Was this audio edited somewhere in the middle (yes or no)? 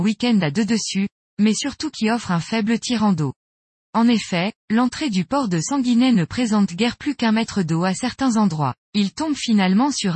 yes